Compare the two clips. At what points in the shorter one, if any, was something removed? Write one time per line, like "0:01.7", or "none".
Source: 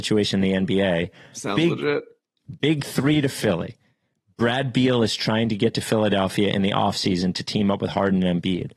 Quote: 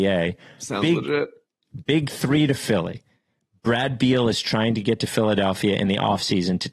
none

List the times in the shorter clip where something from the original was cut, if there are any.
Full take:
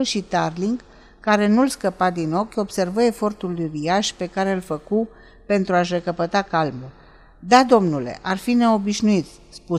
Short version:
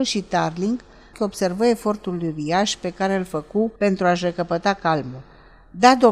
0:01.1
0:03.8

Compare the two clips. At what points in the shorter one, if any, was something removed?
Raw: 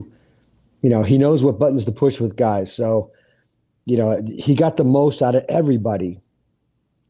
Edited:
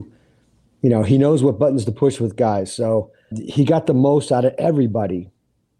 0:03.3

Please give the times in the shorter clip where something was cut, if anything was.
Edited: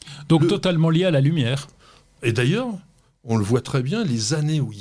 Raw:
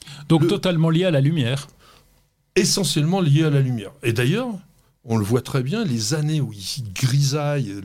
0:02.2

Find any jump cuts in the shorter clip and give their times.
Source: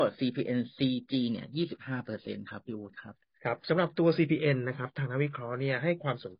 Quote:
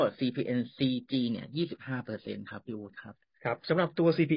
none

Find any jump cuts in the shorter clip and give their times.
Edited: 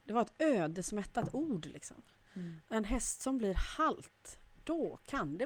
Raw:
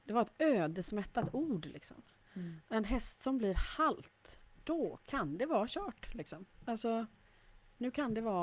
none

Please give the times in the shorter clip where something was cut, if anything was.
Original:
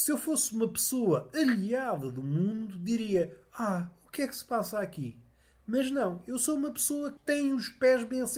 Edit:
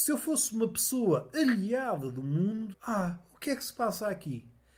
0:02.7

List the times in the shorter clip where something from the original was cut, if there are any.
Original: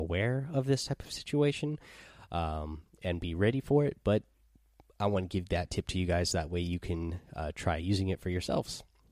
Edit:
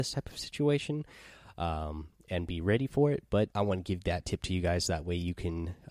0:03.5

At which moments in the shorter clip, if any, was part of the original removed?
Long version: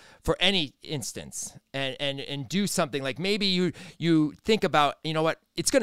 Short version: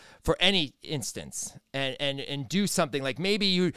none

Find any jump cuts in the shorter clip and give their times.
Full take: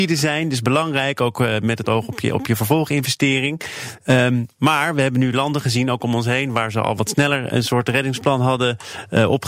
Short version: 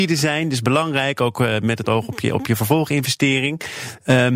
none

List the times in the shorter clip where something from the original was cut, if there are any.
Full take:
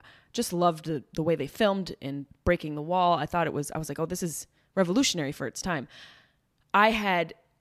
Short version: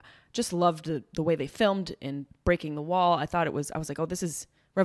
none

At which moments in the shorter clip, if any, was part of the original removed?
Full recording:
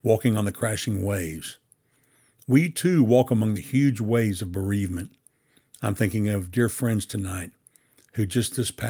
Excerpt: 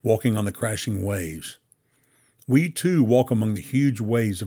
none

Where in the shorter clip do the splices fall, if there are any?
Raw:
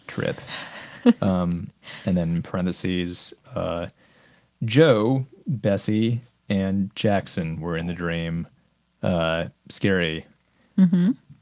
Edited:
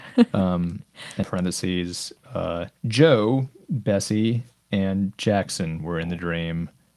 0:01.2
0:02.8

